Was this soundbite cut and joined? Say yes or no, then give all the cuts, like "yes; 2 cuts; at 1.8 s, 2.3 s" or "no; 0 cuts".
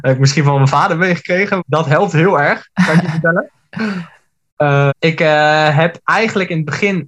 yes; 2 cuts; at 1.6 s, 4.9 s